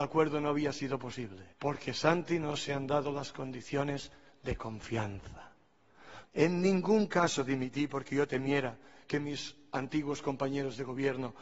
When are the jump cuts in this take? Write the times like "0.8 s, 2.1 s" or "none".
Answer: 1.5 s, 6.3 s

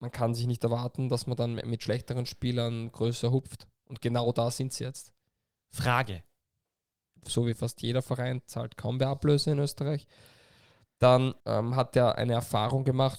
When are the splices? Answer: 7.2 s, 11.4 s

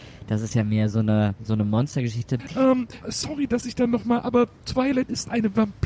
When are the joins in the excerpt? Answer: 3.0 s

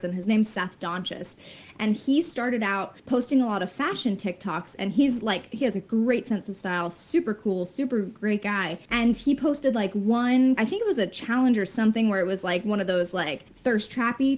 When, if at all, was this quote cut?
none

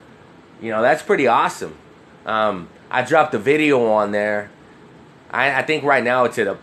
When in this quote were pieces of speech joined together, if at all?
2.1 s

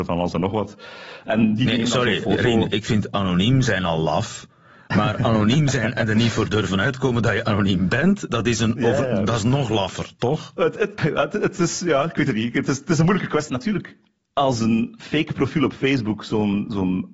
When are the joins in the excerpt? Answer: 11.0 s, 13.5 s

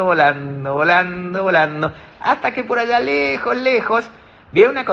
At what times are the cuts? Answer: none

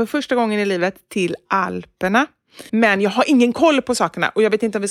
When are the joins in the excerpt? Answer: 2.7 s

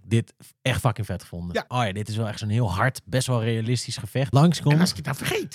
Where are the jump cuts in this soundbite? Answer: 1.7 s, 4.3 s

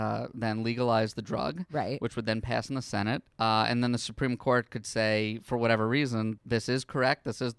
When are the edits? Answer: 3.3 s, 6.4 s

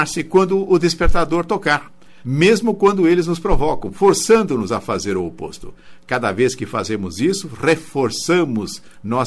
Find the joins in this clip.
2.2 s

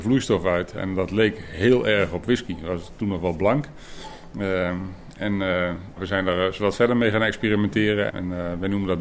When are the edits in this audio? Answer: 6.0 s, 8.1 s

